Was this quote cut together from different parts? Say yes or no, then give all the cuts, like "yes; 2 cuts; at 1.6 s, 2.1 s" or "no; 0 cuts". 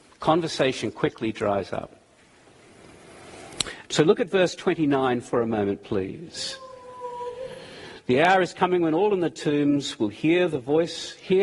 yes; 1 cut; at 3.8 s